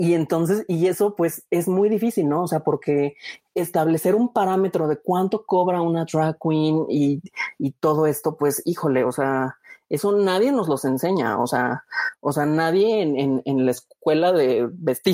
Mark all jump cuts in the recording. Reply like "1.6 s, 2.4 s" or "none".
none